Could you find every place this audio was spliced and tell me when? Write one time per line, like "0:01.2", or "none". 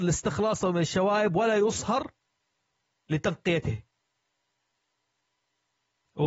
none